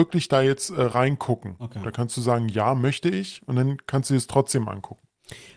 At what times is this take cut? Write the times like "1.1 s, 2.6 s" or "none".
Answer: none

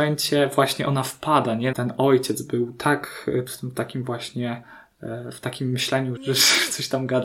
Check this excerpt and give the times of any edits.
1.7 s, 3.5 s, 6.2 s

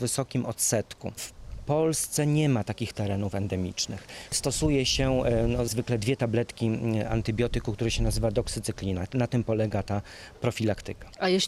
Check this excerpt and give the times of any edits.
5.7 s

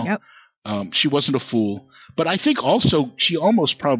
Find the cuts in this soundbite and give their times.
none

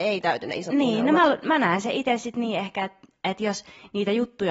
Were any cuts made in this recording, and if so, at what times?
none

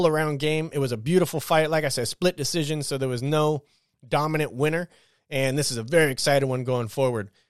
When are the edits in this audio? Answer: none

